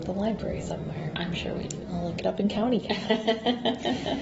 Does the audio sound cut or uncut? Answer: uncut